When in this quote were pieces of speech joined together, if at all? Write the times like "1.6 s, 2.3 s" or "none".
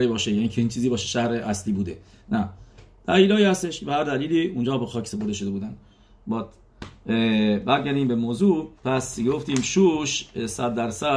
8.8 s